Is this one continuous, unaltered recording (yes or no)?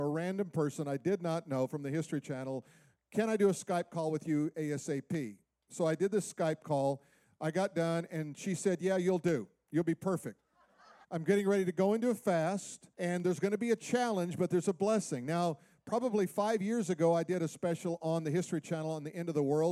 no